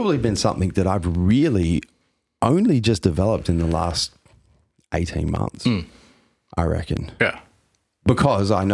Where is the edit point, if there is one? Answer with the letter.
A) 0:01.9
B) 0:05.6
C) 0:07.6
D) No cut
D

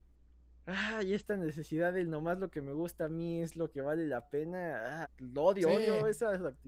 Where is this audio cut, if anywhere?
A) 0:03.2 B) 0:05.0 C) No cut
B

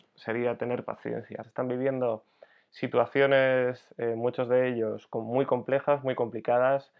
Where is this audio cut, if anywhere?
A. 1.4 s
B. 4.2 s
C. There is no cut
A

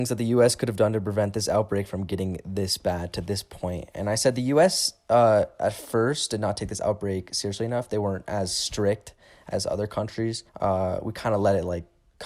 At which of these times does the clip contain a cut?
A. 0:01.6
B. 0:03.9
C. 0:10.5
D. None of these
C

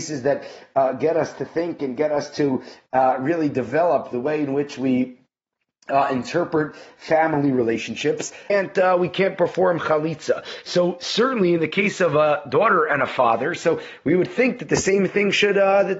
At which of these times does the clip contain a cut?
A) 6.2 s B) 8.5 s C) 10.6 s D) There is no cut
B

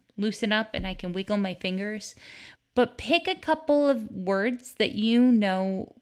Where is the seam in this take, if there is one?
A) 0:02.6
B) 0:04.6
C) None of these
A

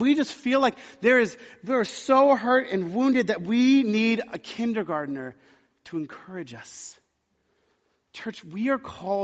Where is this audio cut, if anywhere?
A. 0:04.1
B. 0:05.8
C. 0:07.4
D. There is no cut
D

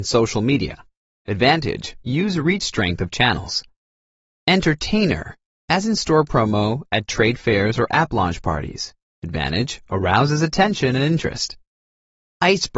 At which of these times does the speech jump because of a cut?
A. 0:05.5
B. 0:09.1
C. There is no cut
C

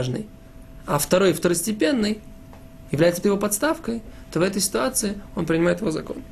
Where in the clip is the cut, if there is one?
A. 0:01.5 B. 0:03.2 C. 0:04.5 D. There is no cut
B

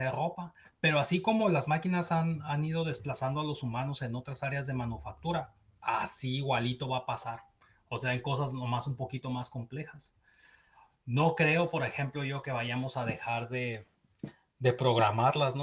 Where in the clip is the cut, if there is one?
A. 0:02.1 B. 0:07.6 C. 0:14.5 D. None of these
D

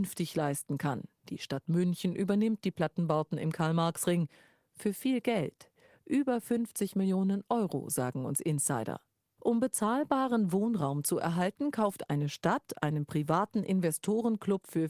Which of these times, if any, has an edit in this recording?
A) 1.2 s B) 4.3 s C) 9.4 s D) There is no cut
C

